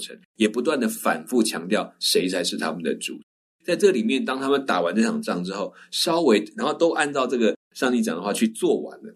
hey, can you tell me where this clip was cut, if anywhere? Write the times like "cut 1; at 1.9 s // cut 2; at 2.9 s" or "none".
none